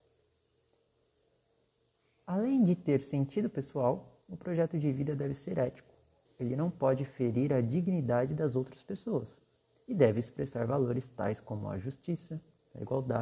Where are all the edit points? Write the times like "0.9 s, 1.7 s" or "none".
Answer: 6.2 s